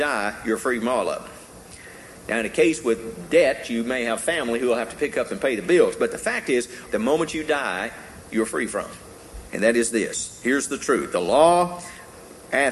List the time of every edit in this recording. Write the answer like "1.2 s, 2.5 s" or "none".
6.9 s, 9.5 s

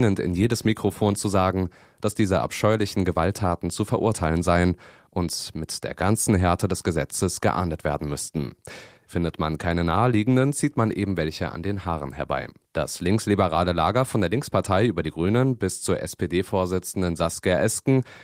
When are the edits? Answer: 9.0 s, 12.6 s

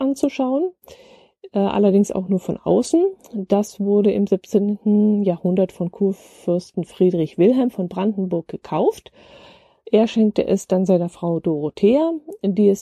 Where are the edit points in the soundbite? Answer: none

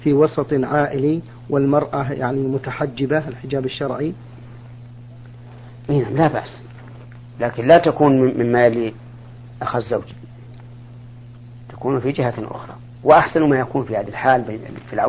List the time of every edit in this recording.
none

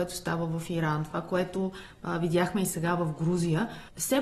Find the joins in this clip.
none

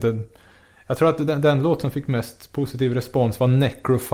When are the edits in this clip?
none

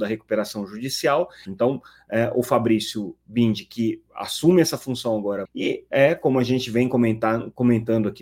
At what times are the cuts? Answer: 1.4 s, 5.4 s

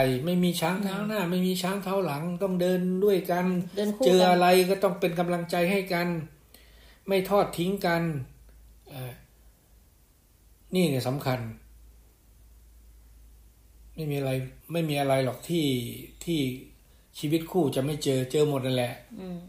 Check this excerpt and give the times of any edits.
14.6 s

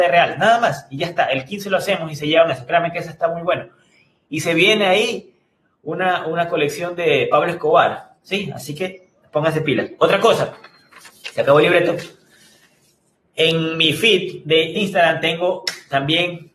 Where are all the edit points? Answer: 8.2 s, 14.8 s

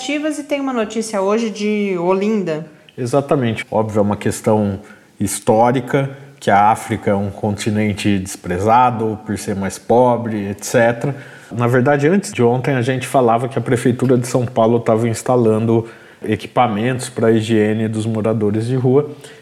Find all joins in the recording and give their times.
3.6 s, 11.5 s

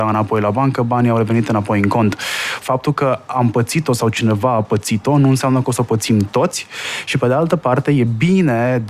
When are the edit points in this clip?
2.6 s

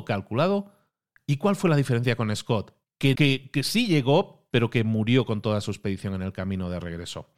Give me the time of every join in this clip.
3.1 s, 4.5 s

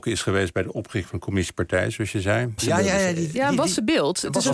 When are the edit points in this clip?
2.6 s

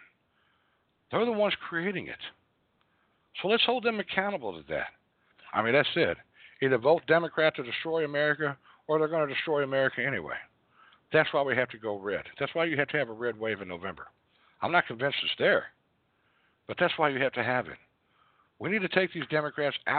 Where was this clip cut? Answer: 5.3 s

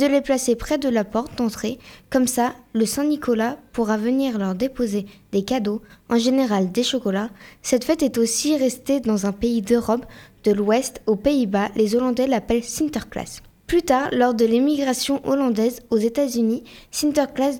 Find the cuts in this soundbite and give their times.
none

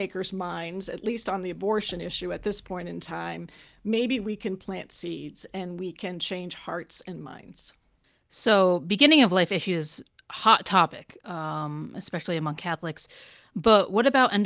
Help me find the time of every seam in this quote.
none

